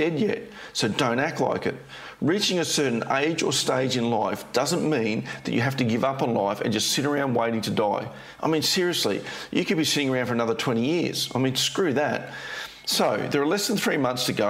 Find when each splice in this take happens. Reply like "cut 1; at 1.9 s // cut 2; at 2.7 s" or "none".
none